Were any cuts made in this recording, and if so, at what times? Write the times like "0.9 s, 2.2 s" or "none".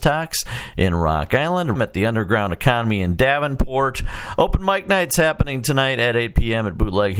1.8 s